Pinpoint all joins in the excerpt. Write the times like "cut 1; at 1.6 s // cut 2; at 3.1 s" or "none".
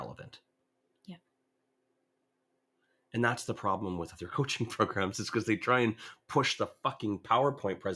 none